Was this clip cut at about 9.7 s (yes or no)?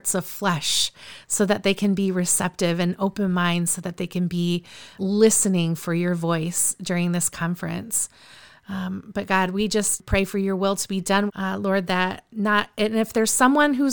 no